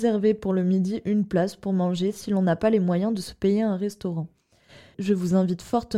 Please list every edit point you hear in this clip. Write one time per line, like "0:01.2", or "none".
0:04.9

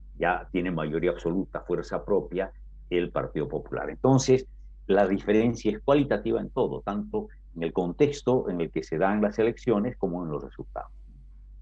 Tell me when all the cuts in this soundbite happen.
none

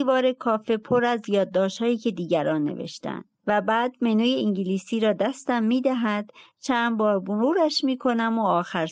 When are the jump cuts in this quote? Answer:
0:03.4

